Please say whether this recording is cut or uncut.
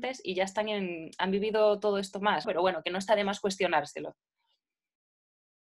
cut